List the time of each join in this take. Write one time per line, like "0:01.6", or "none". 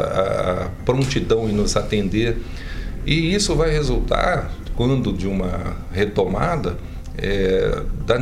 none